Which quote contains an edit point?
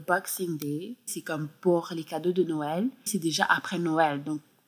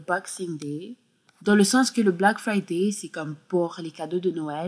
first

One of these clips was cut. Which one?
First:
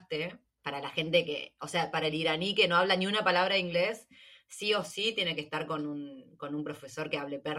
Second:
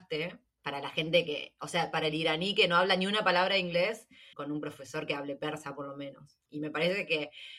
second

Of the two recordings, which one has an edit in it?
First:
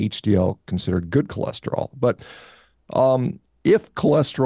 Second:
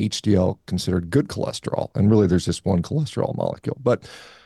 first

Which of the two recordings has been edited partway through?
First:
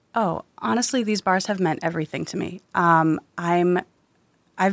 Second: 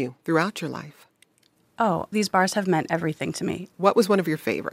second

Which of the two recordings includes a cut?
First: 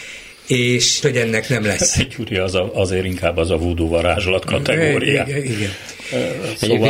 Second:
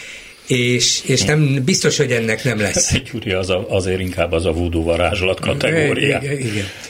first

